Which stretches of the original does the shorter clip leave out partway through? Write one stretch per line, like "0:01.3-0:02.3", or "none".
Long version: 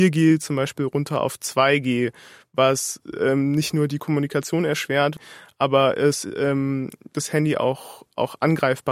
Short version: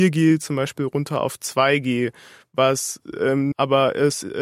0:03.5-0:05.5